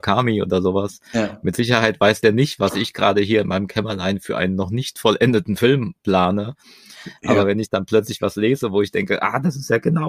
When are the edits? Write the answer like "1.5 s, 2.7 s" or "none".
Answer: none